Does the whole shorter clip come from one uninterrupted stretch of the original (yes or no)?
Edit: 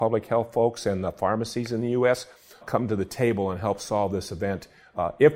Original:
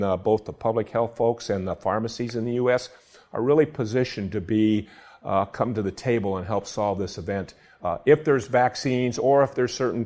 no